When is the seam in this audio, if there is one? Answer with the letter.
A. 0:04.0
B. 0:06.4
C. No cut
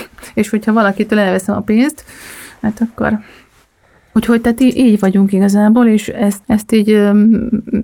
B